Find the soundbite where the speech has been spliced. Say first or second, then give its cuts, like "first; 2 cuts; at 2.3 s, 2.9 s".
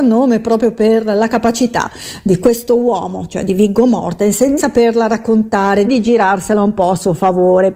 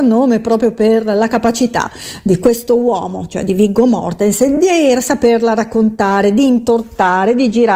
first; 2 cuts; at 4.6 s, 5.8 s